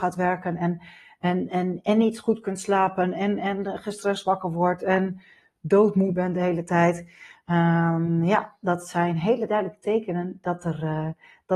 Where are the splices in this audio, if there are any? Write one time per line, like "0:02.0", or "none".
none